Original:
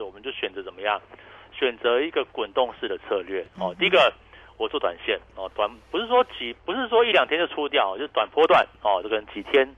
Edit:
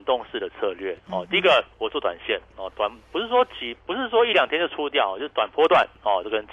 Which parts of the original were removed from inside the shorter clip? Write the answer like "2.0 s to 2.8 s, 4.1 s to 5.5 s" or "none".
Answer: 4.2 s to 4.5 s